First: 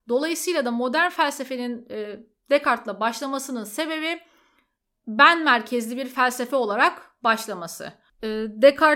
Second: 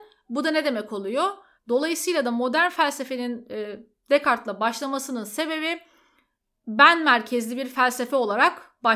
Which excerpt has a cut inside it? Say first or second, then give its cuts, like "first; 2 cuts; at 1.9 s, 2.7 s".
second; 1 cut; at 1.6 s